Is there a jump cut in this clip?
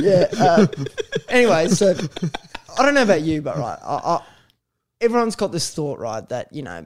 no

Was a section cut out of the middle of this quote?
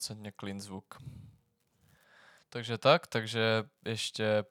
no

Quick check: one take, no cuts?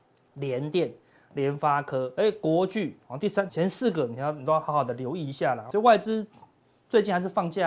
no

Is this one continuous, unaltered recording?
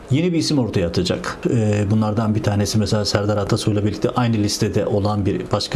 no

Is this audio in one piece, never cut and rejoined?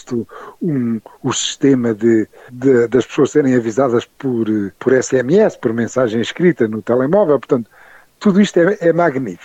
no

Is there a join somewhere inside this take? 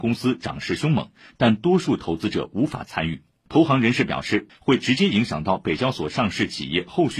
yes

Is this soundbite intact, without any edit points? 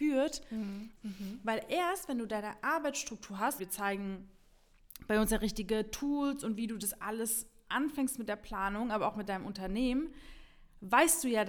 no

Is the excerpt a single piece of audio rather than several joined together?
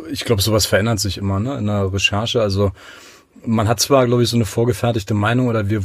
yes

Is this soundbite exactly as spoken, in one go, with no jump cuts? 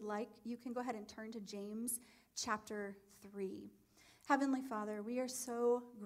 yes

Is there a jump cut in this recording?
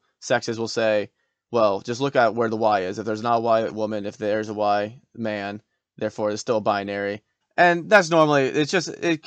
yes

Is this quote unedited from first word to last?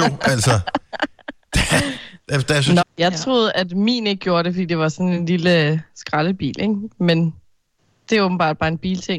no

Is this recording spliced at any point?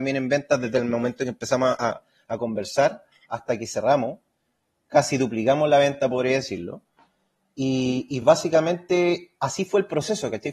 no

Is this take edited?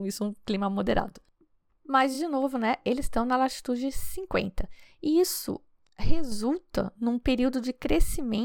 no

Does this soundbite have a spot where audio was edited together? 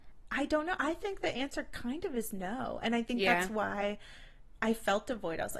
no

